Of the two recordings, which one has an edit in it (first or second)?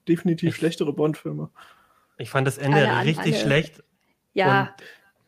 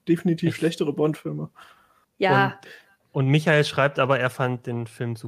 second